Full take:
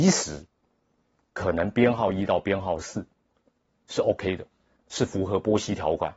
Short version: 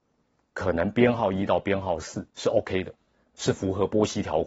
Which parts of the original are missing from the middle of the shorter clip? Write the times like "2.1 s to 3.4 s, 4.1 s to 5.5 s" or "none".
3.1 s to 3.8 s